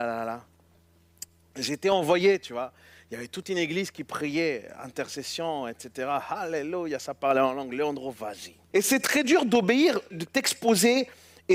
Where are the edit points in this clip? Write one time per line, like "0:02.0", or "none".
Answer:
0:08.7
0:10.1